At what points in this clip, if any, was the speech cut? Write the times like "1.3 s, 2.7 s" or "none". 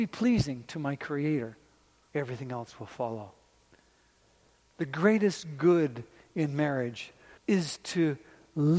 2.1 s, 7.4 s

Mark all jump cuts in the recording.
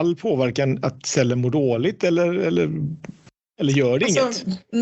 none

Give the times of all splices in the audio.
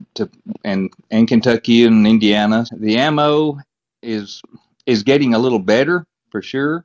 2.7 s

